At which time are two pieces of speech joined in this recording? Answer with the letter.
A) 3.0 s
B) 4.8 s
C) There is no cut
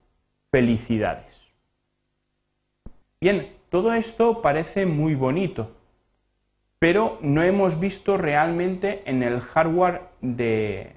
A